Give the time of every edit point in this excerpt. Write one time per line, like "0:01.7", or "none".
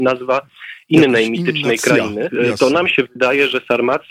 0:02.3